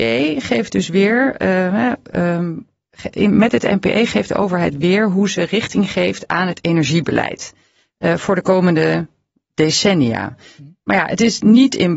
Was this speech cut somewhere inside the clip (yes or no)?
no